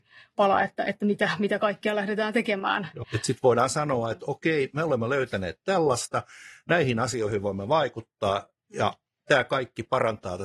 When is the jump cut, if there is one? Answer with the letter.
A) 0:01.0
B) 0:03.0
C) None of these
B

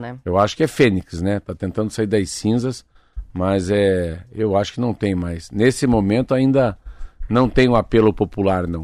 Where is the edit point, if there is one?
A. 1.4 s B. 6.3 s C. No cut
C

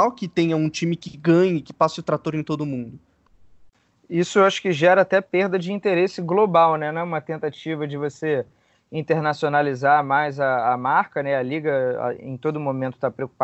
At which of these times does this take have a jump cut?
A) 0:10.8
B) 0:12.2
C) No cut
C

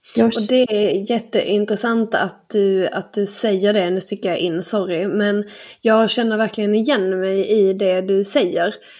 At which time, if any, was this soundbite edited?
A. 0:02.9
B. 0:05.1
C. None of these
C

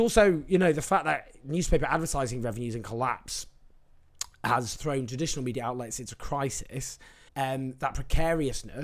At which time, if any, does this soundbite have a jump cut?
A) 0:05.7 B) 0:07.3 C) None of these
B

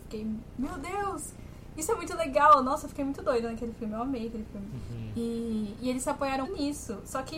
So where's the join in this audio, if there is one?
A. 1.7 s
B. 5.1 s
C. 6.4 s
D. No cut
C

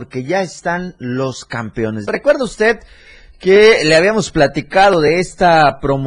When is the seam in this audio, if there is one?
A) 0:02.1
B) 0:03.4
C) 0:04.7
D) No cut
A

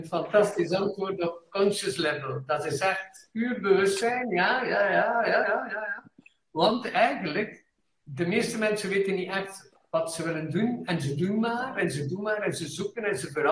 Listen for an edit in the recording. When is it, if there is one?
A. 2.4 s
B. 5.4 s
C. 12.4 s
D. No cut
B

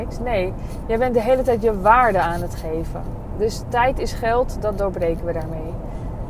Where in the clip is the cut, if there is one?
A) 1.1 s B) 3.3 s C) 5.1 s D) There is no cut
D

